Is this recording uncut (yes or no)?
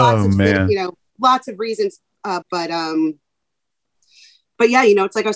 no